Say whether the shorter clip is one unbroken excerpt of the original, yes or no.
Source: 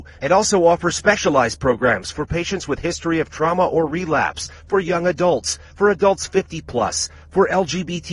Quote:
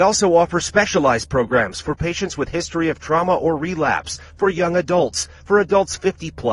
yes